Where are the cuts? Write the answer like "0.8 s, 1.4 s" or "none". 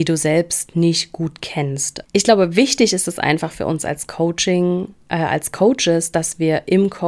2.0 s